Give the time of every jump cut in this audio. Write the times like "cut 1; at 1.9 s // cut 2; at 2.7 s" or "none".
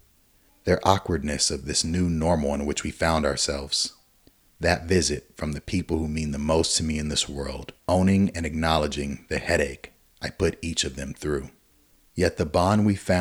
cut 1; at 4.5 s // cut 2; at 7.8 s